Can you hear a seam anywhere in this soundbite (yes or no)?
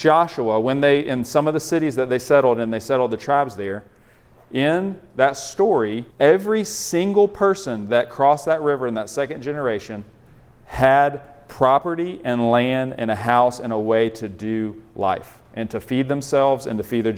yes